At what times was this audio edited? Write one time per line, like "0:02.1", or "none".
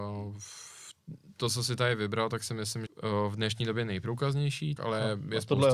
0:02.9
0:04.8